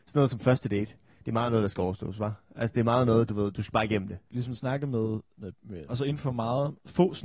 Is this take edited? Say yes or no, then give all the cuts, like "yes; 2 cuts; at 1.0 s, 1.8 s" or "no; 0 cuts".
yes; 2 cuts; at 4.3 s, 5.9 s